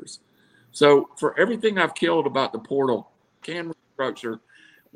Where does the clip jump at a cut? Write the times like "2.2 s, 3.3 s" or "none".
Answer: 3.4 s